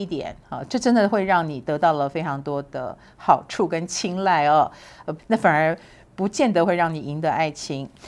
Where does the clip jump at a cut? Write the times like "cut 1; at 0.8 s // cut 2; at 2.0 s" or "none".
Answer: cut 1; at 5.2 s